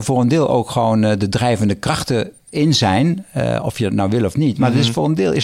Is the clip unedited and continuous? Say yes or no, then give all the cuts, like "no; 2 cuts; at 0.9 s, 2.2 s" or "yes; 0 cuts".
yes; 0 cuts